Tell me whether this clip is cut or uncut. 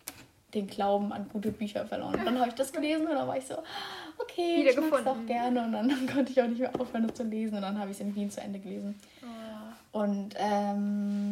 uncut